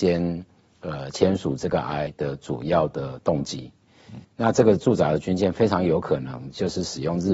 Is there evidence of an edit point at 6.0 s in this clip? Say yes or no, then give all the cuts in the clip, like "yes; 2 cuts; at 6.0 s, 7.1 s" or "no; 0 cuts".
no; 2 cuts; at 2.1 s, 4.2 s